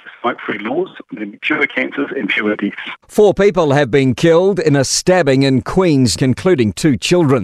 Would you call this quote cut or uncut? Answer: cut